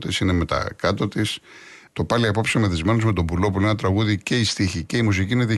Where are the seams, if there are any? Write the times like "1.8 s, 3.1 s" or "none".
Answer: 1.9 s